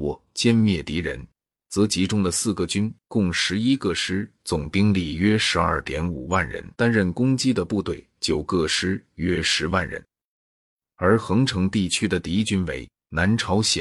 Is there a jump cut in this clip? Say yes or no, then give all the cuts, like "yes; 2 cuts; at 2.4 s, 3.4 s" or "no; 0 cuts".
yes; 1 cut; at 6.7 s